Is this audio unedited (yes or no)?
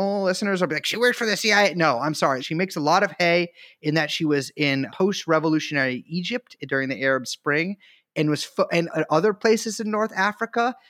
no